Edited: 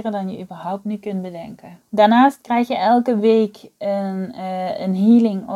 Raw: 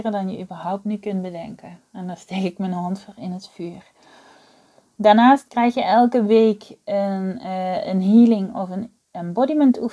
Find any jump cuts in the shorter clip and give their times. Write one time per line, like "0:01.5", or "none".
0:01.8